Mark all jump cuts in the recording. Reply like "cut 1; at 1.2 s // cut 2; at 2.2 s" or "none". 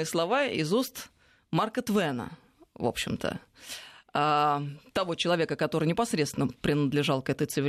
none